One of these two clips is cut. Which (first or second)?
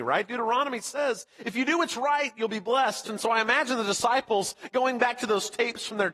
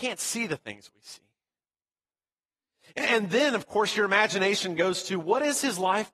first